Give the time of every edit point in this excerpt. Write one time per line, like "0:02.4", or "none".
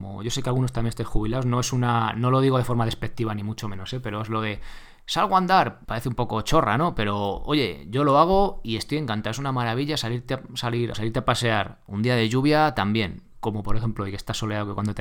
0:05.8
0:10.9
0:13.3